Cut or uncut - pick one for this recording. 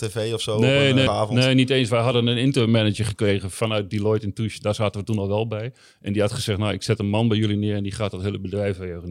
cut